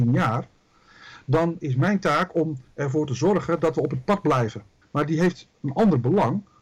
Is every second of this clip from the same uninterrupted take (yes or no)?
no